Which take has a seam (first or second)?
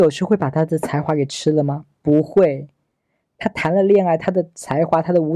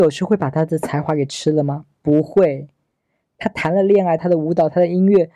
second